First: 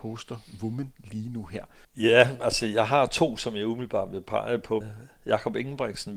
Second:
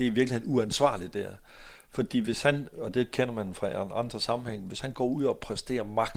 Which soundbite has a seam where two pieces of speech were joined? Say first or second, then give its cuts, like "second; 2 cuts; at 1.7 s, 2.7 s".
first; 2 cuts; at 1.8 s, 4.8 s